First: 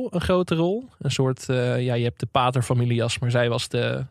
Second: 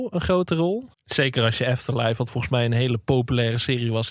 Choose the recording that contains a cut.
second; 1 cut; at 0.9 s

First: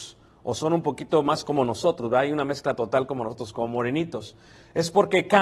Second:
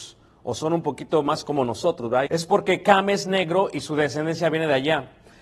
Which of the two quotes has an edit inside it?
second; 1 cut; at 2.3 s

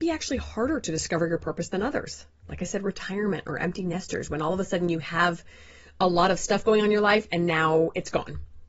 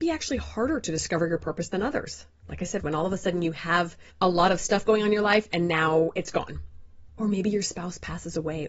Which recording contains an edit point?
second; 2 cuts; at 2.8 s, 4.1 s

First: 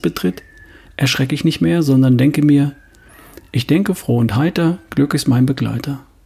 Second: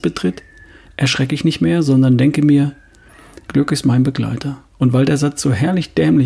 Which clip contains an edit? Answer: second; 2 cuts; at 3.4 s, 4.7 s

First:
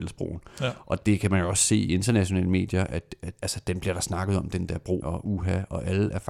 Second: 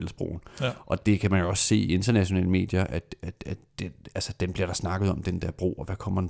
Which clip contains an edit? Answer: first; 2 cuts; at 3.4 s, 5.0 s

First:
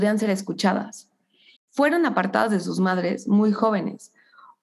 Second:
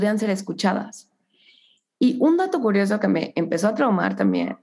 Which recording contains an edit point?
first; 1 cut; at 1.6 s

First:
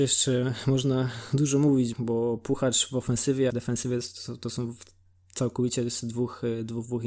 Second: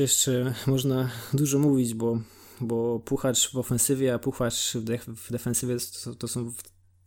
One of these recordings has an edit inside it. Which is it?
first; 2 cuts; at 1.9 s, 3.5 s

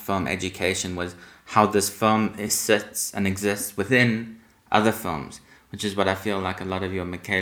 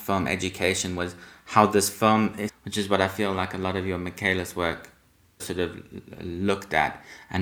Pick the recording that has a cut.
second; 2 cuts; at 2.5 s, 5.4 s

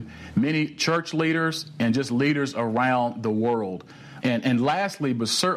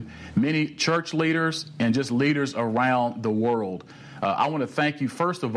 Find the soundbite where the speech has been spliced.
first; 1 cut; at 4.2 s

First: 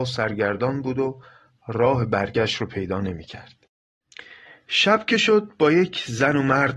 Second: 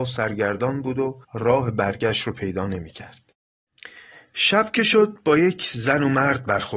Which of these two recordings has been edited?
second; 1 cut; at 1.2 s

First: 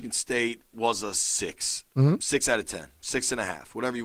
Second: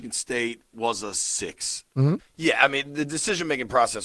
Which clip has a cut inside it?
second; 1 cut; at 2.2 s

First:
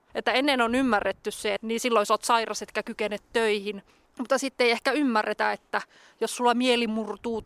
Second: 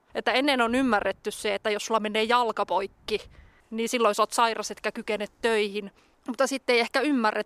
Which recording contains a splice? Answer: first; 1 cut; at 1.6 s

